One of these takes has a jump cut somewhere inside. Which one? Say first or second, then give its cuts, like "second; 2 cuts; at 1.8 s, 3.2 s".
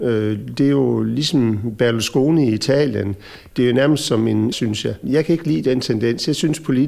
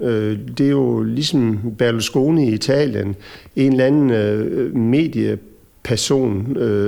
first; 2 cuts; at 3.5 s, 4.5 s